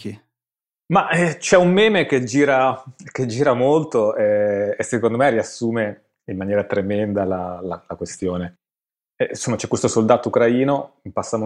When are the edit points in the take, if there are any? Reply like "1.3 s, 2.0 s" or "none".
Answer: none